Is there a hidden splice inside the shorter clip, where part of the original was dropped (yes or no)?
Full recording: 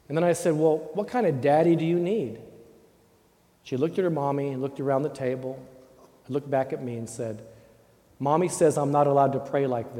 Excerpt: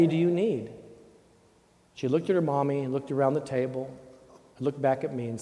no